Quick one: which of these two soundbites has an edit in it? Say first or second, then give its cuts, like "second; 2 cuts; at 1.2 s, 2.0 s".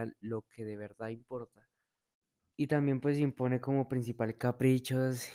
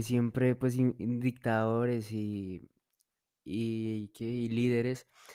first; 1 cut; at 2.5 s